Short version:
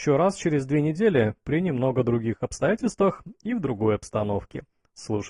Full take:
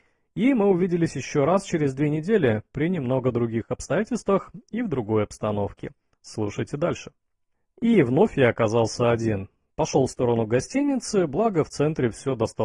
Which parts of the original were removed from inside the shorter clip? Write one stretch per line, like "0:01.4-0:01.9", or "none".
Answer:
none